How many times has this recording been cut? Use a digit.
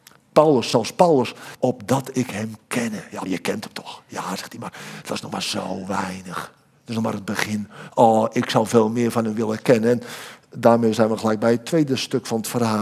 2